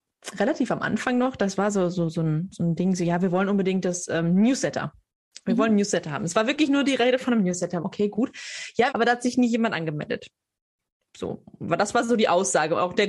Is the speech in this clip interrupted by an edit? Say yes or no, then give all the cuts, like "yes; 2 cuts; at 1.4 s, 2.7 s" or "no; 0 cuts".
yes; 2 cuts; at 7.8 s, 8.9 s